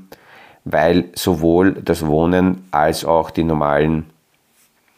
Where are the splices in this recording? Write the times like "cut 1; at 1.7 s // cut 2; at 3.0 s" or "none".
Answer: none